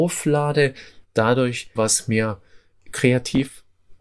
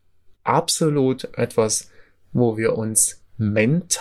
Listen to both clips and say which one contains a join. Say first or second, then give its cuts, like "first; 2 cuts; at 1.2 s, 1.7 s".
first; 1 cut; at 1.8 s